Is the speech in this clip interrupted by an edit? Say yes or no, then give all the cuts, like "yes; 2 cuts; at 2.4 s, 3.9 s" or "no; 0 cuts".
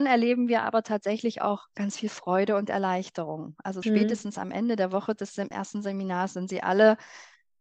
yes; 2 cuts; at 3.8 s, 5.5 s